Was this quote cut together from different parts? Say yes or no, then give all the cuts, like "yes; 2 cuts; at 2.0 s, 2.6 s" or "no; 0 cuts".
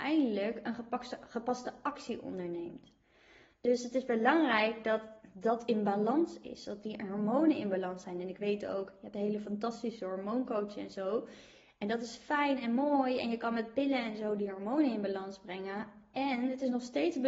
no; 0 cuts